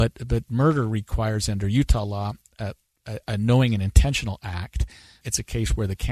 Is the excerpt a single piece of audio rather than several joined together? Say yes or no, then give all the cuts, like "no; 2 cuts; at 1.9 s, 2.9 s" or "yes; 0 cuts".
no; 1 cut; at 5.2 s